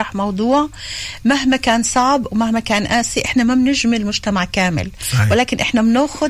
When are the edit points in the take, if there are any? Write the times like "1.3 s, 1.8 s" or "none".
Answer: none